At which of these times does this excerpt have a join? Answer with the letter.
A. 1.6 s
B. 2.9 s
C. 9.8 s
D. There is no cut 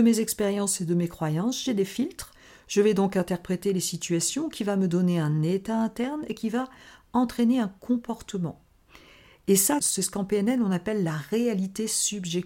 C